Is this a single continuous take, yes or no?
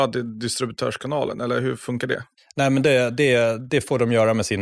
yes